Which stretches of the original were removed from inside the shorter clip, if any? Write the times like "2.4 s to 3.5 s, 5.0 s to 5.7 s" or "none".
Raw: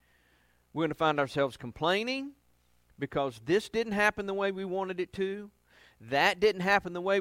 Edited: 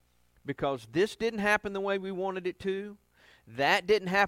none

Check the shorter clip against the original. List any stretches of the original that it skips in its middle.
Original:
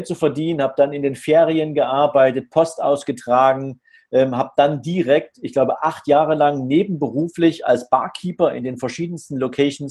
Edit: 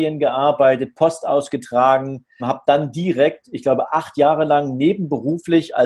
4.0 s to 4.3 s

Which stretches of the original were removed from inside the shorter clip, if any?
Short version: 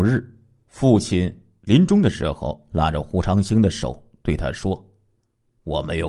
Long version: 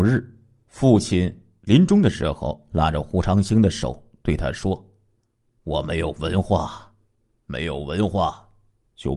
none

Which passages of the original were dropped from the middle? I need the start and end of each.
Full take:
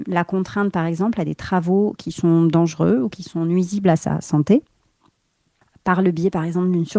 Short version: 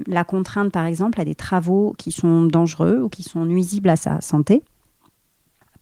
none

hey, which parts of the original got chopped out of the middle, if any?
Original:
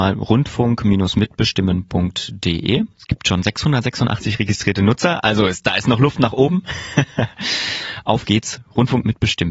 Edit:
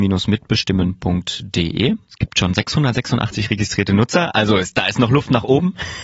none

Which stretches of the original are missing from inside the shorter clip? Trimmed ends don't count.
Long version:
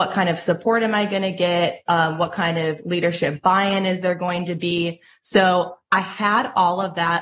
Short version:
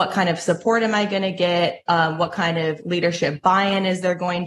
none

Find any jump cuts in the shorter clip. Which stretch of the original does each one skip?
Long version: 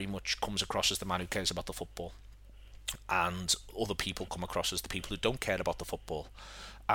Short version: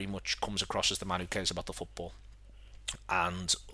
none

